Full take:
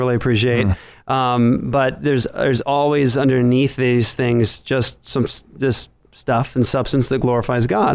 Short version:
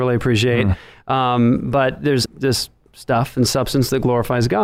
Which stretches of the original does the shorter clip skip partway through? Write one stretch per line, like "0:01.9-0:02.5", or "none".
0:02.3-0:05.4